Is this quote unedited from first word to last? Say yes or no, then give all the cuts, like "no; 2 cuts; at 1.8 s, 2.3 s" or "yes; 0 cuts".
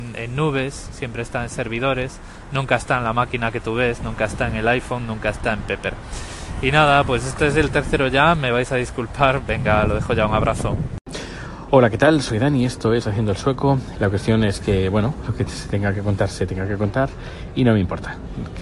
no; 2 cuts; at 13.9 s, 15.2 s